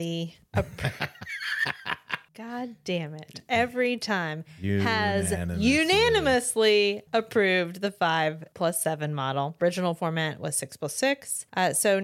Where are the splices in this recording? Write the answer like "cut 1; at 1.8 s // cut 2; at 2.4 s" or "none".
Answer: none